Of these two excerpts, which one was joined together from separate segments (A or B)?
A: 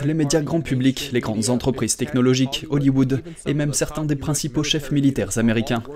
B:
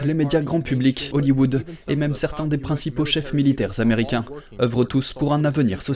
B